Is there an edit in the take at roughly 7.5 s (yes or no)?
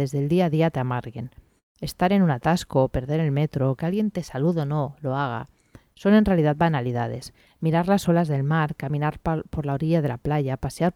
yes